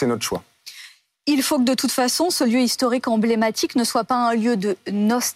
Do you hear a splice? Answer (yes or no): no